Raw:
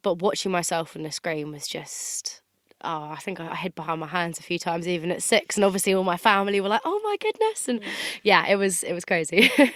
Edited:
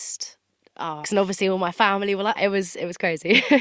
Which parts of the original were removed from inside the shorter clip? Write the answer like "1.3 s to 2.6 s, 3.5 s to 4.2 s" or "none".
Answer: 3.1 s to 5.5 s, 6.8 s to 8.4 s